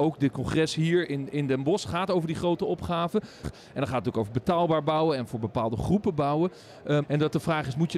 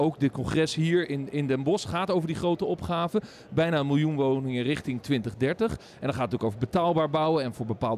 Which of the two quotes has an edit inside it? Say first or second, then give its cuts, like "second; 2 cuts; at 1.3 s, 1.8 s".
first; 2 cuts; at 3.4 s, 7.0 s